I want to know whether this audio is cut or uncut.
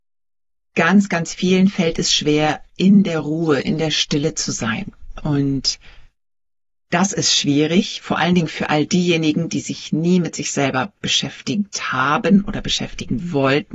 uncut